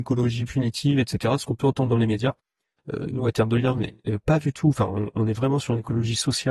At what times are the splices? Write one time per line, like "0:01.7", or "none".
none

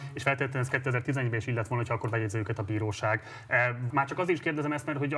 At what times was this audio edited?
0:03.9

